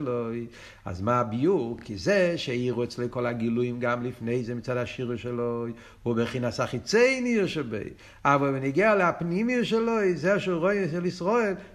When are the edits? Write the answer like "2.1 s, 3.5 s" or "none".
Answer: none

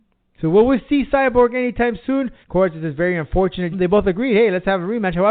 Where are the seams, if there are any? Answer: 2.4 s, 3.7 s

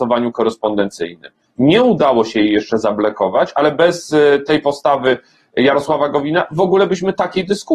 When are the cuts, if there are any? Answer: none

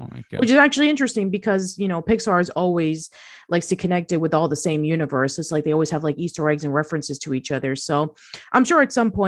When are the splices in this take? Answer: none

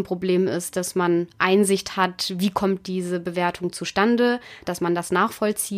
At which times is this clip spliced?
4.6 s

